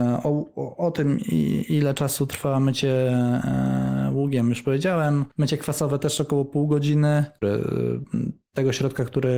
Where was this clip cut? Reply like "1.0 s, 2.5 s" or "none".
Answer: 7.4 s